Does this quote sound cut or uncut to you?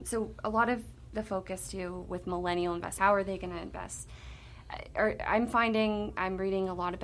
cut